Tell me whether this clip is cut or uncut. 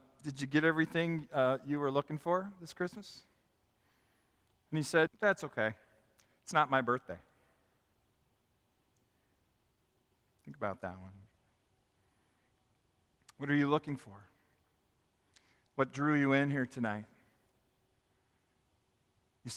cut